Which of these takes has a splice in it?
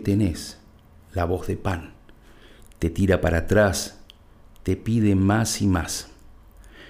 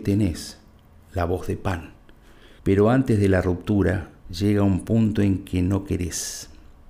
second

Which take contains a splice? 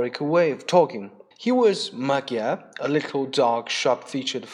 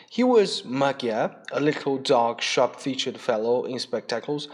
first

